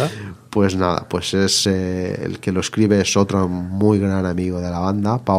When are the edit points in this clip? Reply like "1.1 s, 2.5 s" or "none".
none